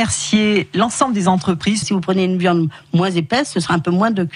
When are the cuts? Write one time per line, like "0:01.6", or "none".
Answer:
0:01.8